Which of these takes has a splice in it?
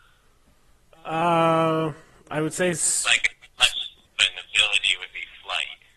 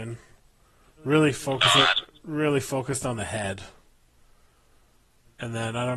first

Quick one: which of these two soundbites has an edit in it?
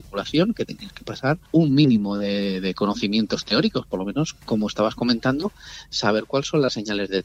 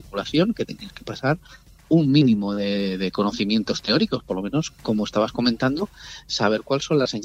first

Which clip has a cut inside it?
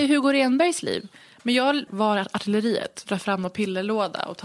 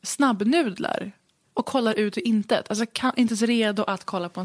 first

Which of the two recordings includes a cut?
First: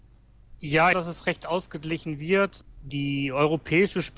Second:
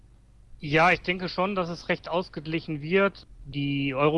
first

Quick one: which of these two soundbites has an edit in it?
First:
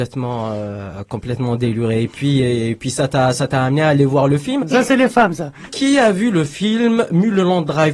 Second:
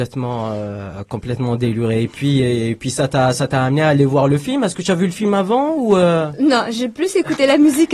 first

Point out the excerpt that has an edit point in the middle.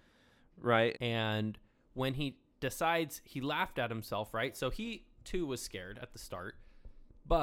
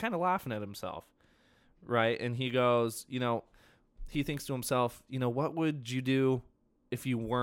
first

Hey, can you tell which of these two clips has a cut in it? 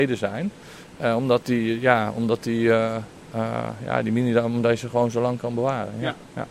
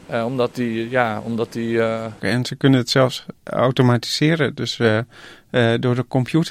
second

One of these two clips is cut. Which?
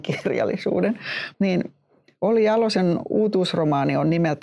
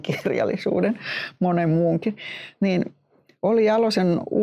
first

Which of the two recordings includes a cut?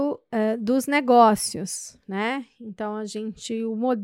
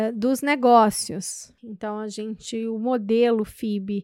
second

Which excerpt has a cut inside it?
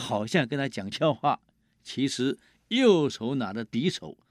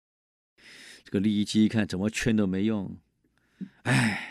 first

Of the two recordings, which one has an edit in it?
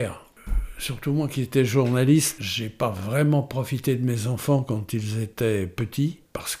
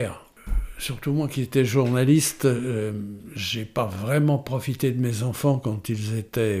first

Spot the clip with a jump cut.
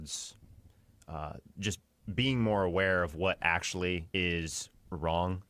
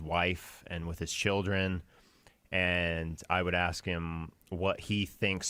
first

